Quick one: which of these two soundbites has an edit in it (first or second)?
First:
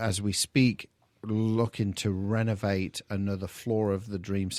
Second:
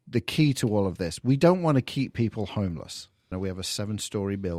second